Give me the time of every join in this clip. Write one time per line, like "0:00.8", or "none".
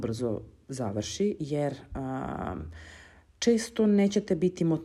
none

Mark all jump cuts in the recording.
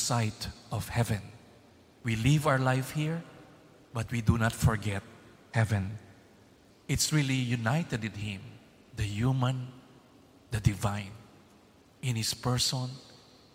0:01.9
0:06.7

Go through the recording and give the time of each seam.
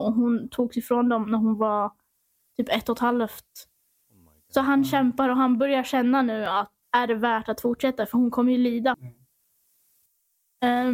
0:06.8
0:08.9

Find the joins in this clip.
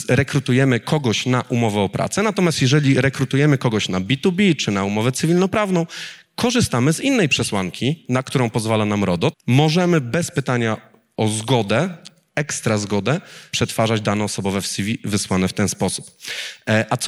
0:09.3
0:13.5

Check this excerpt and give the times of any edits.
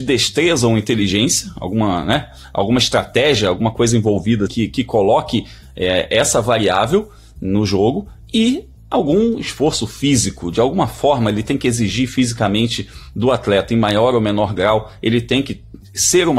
0:04.5

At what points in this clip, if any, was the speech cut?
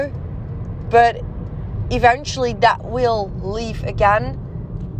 none

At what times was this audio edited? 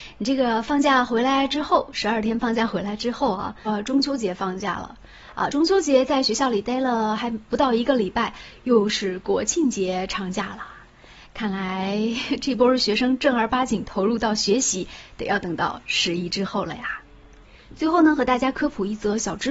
0:03.7

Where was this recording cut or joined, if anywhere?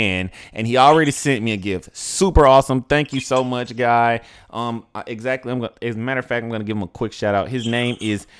none

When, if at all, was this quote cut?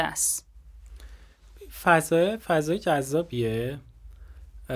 none

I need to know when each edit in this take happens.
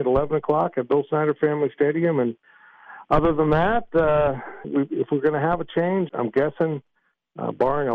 0:04.6
0:06.1

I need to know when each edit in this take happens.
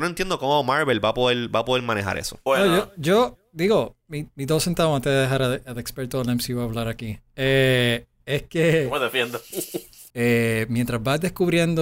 0:10.1

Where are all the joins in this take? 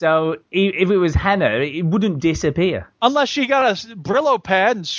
0:02.2

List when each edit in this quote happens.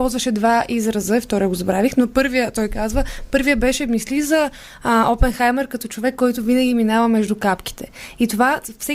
none

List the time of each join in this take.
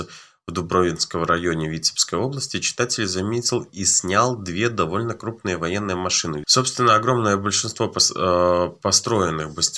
0:06.4

